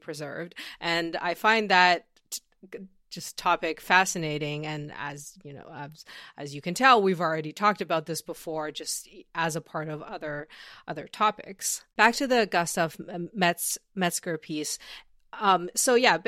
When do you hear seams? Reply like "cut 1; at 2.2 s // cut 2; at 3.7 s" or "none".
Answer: cut 1; at 11.9 s